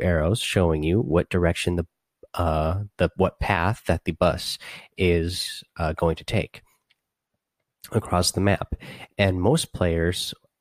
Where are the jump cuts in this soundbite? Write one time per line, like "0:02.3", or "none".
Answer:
none